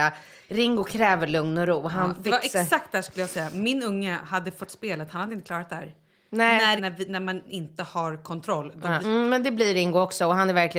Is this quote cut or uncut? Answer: cut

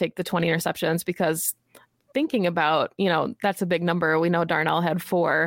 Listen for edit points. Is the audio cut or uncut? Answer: uncut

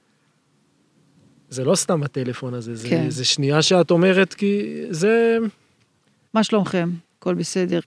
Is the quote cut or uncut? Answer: cut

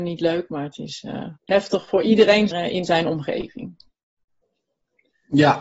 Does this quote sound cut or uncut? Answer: cut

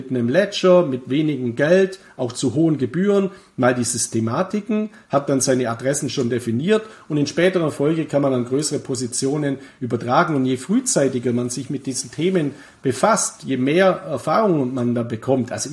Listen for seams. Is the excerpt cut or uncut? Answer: uncut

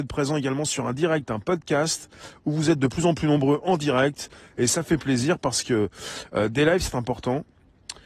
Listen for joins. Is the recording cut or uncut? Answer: uncut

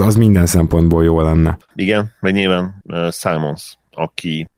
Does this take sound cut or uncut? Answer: uncut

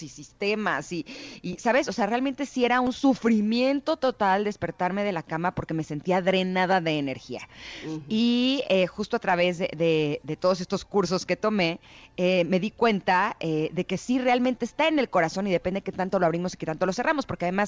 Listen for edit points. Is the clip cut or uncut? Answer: uncut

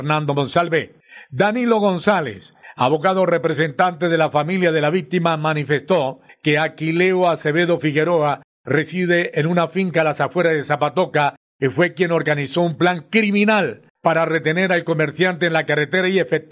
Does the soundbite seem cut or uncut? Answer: uncut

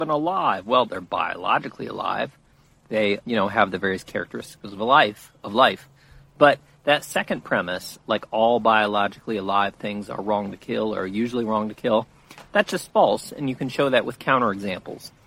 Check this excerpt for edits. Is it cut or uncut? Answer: cut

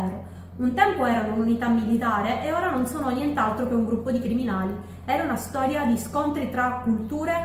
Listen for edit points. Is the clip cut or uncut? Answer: cut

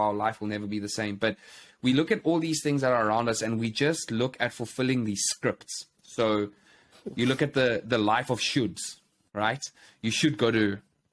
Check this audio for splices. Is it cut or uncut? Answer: uncut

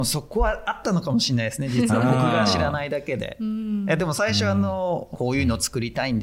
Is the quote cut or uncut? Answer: cut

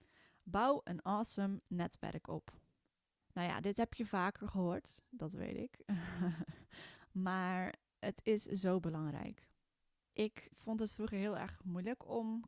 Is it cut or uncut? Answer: cut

